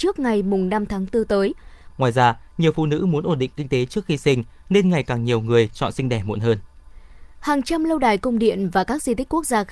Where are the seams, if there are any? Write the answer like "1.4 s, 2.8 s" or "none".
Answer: 1.9 s